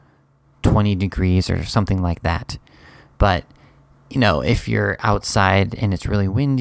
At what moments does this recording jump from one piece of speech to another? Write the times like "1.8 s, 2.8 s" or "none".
none